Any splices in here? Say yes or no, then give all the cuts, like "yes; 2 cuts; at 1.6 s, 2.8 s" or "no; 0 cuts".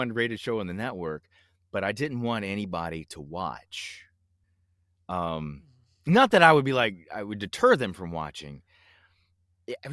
no; 0 cuts